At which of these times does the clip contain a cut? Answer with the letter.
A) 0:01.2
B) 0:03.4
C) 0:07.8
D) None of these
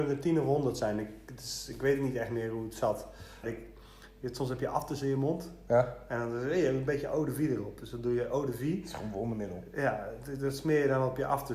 B